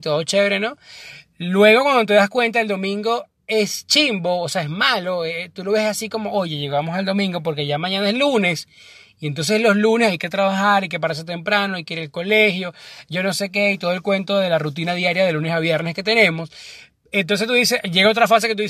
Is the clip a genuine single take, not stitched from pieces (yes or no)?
yes